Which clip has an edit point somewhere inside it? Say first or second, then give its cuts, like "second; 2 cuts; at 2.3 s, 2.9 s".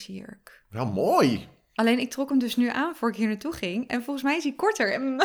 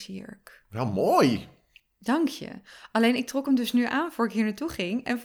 first; 1 cut; at 1.7 s